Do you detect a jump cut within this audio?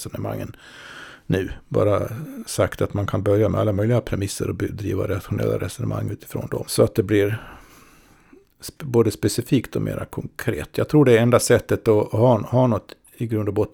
yes; 1 cut; at 6.7 s

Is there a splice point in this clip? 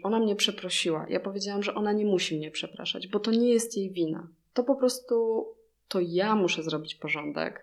no; 0 cuts

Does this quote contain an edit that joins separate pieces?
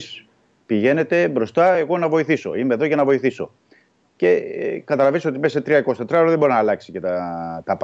no; 0 cuts

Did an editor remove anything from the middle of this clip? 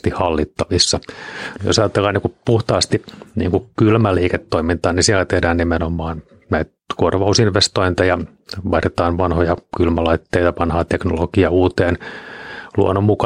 yes; 1 cut; at 1.6 s

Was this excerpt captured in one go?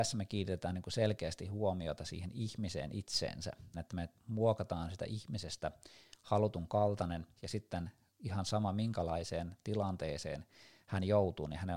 no; 2 cuts; at 3.7 s, 7.3 s

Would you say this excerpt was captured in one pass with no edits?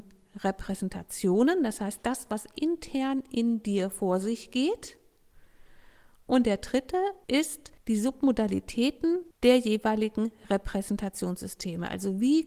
yes; 0 cuts

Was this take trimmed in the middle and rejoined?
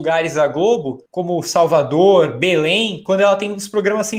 yes; 1 cut; at 1.1 s

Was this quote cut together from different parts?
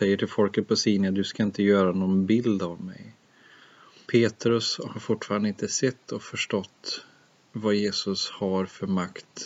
yes; 1 cut; at 4.0 s

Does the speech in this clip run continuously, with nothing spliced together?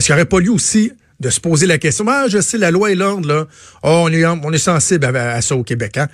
yes; 0 cuts

